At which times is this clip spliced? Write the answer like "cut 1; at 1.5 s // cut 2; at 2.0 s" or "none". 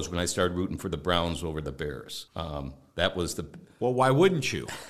cut 1; at 2.3 s